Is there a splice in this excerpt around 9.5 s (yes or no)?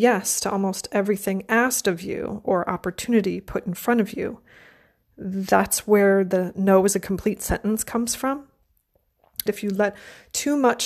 yes